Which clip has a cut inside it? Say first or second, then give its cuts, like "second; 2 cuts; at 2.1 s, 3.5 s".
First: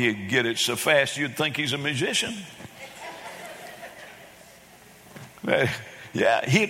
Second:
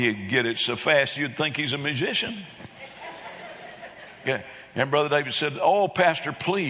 second; 1 cut; at 4.2 s